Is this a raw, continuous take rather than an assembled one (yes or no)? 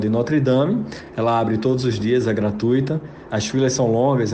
yes